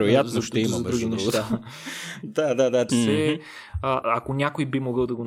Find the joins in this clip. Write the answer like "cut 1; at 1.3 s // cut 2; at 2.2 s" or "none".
cut 1; at 2.9 s // cut 2; at 4.0 s